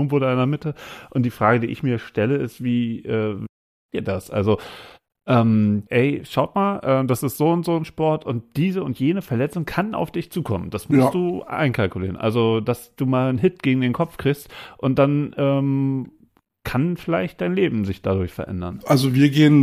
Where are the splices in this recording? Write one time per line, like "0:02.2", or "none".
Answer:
0:05.9